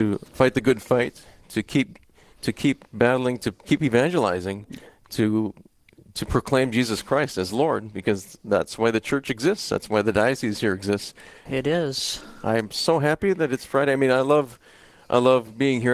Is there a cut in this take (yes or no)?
yes